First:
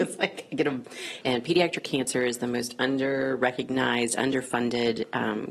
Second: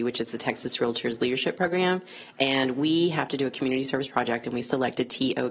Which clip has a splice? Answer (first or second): first